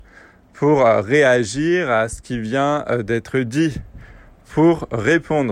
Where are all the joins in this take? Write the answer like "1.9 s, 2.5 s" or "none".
none